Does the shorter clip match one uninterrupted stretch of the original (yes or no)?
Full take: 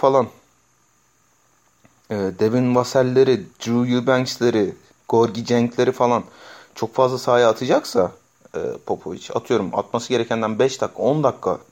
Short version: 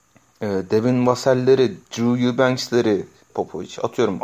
no